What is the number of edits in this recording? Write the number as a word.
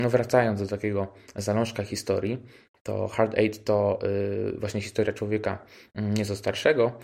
zero